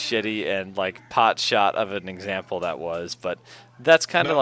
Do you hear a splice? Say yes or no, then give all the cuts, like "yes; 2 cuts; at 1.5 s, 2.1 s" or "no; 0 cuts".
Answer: no; 0 cuts